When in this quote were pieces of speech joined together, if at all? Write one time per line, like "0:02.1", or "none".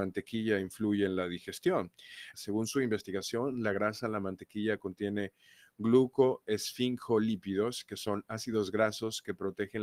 0:02.3